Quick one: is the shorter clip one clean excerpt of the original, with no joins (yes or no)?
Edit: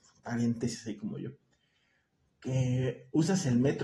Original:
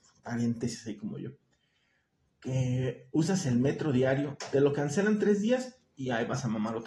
yes